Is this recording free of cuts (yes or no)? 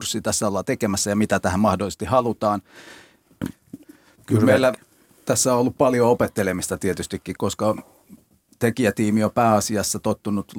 no